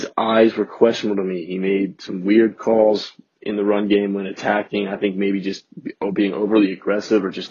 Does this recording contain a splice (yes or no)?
no